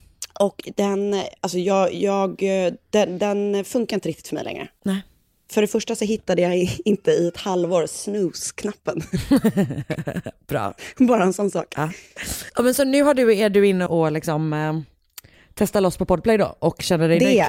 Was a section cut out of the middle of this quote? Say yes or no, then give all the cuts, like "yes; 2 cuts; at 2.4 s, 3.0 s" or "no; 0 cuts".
yes; 1 cut; at 13.9 s